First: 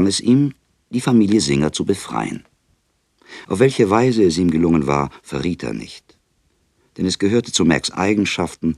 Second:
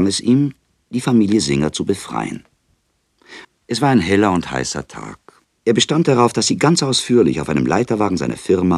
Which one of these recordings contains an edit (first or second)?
second